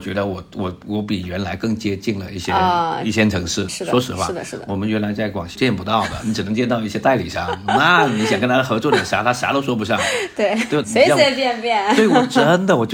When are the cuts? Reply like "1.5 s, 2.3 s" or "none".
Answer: 3.7 s, 5.5 s, 10.8 s